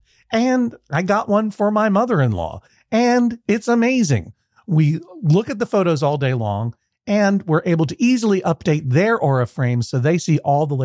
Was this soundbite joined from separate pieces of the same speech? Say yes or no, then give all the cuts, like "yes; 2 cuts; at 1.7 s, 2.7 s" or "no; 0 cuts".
no; 0 cuts